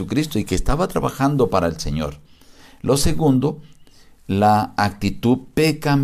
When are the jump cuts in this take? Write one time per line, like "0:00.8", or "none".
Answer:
none